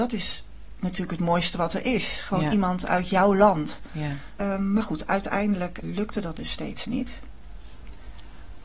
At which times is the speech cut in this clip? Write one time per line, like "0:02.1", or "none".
0:04.4
0:05.8